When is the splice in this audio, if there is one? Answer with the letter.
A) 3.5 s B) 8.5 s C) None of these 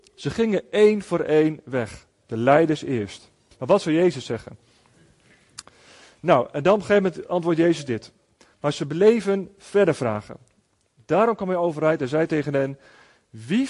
A